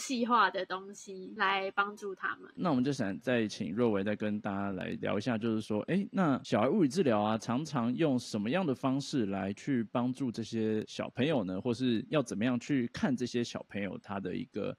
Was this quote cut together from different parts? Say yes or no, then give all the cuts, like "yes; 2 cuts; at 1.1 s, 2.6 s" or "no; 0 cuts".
no; 0 cuts